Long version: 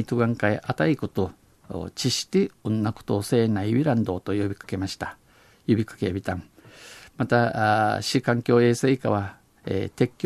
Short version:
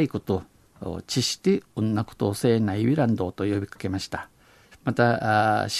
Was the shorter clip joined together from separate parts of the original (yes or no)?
yes